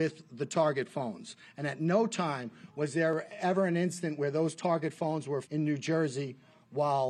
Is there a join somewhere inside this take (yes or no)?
yes